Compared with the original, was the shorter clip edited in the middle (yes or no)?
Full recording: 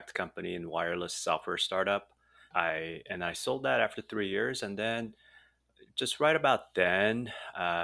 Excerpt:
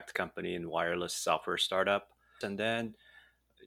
yes